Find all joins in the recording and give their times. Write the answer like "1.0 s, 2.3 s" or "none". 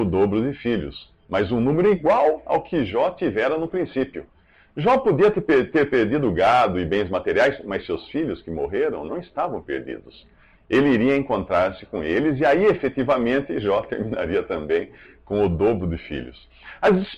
none

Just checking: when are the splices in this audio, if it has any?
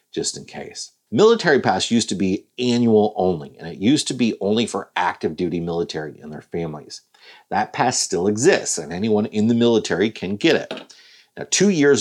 1.1 s

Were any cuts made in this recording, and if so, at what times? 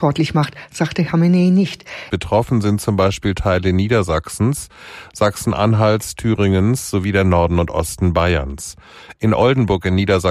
2.1 s

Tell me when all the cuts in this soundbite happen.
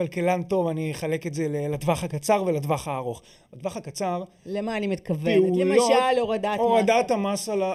none

